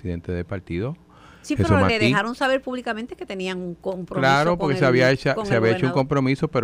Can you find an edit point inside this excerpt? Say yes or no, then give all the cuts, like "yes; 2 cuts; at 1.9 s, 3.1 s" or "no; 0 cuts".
yes; 1 cut; at 1.9 s